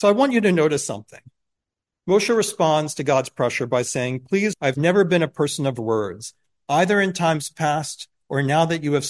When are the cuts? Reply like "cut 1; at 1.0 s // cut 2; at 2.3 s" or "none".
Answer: cut 1; at 4.5 s